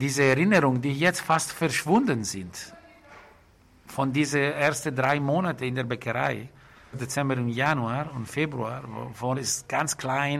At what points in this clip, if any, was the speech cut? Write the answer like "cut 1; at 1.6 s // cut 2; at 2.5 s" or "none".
cut 1; at 6.9 s // cut 2; at 9.3 s

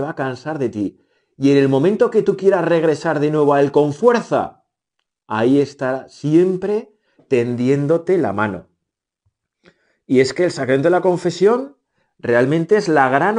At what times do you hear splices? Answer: none

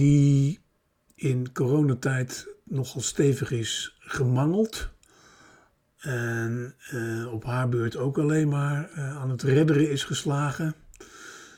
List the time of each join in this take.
none

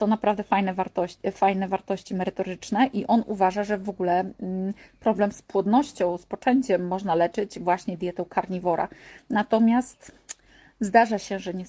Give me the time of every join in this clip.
none

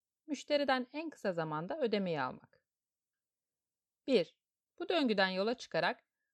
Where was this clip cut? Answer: cut 1; at 4.6 s

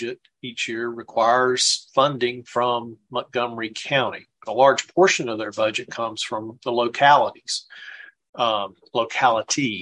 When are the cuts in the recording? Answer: cut 1; at 4.3 s

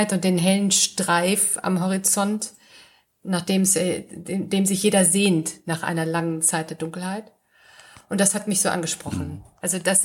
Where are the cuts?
none

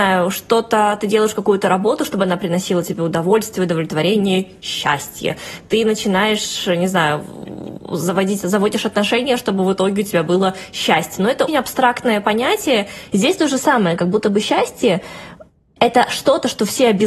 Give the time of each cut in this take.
cut 1; at 11.5 s // cut 2; at 13.1 s

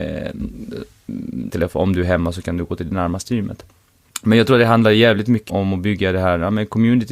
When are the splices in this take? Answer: cut 1; at 1.5 s // cut 2; at 5.5 s

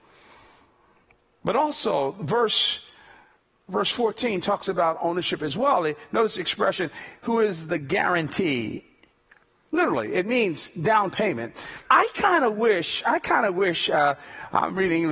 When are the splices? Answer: cut 1; at 9.5 s // cut 2; at 11.8 s

